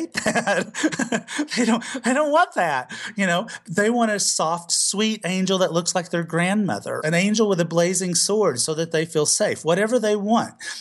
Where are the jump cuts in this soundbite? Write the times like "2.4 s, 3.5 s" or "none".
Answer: 7.0 s